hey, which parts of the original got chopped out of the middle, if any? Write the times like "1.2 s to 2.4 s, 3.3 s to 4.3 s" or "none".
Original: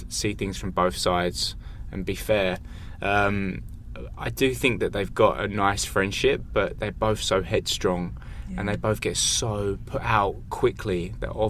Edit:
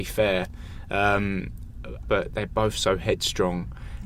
4.1 s to 6.5 s